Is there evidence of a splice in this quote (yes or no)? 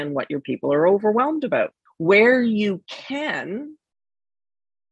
yes